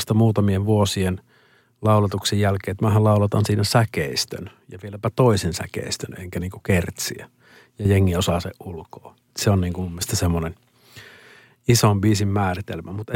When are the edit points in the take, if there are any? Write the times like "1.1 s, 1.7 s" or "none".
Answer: none